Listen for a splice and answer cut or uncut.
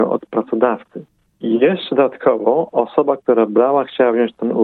uncut